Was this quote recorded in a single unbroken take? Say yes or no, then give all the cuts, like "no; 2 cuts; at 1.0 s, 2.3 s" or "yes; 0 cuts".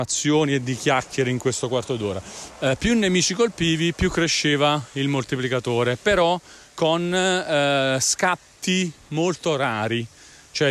no; 1 cut; at 2.5 s